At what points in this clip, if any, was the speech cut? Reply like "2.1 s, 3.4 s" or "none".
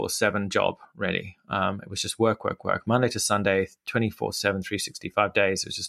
none